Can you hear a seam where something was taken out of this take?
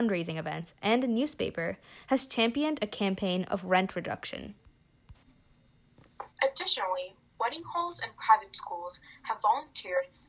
yes; 1 cut; at 6.3 s

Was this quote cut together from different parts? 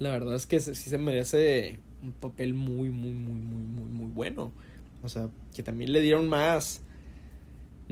yes; 1 cut; at 5.0 s

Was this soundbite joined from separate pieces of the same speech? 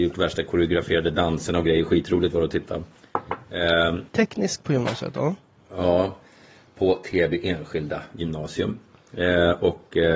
yes; 1 cut; at 4.1 s

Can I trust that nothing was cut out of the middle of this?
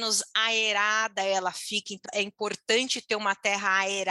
no; 1 cut; at 2.0 s

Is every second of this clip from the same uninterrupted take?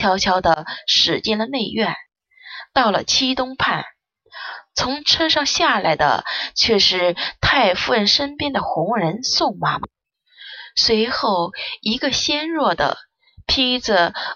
yes; 0 cuts

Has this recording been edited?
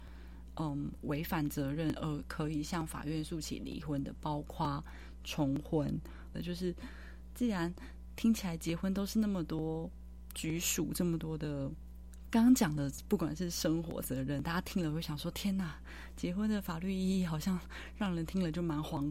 yes; 3 cuts; at 6.3 s, 12.2 s, 14.0 s

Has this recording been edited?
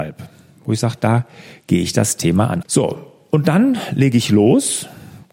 yes; 1 cut; at 2.6 s

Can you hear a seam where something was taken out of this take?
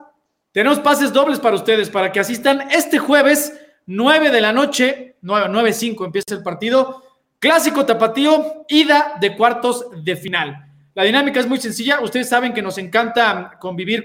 no; 0 cuts

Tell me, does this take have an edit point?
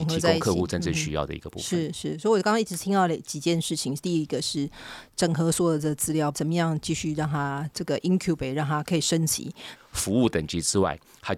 yes; 2 cuts; at 6.3 s, 9.8 s

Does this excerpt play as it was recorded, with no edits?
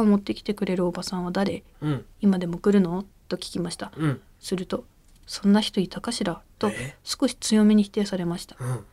yes; 0 cuts

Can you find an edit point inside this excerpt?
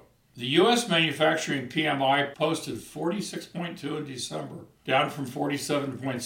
no; 0 cuts

